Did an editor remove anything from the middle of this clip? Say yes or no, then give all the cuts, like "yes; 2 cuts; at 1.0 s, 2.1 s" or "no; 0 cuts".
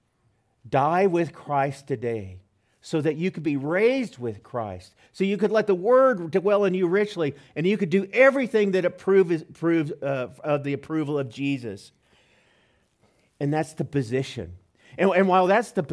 yes; 1 cut; at 5.1 s